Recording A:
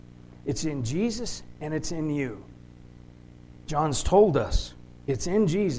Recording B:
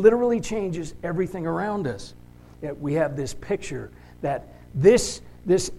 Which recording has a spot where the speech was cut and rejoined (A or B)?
B